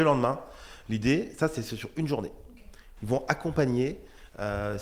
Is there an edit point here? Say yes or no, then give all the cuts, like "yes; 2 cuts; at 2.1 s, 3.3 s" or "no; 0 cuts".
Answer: yes; 1 cut; at 3.0 s